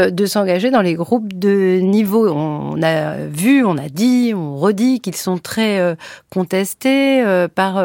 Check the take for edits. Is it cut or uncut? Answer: uncut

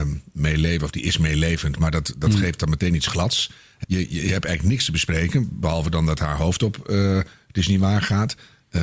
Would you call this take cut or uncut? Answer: cut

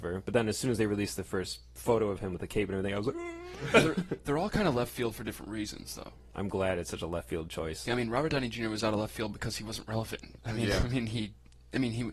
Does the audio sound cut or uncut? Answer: cut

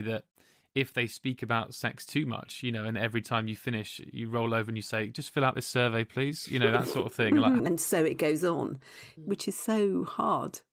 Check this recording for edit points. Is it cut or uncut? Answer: cut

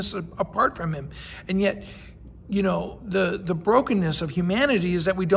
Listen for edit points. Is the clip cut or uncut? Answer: uncut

